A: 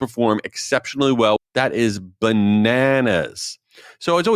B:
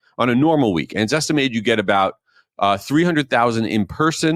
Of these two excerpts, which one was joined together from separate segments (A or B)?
A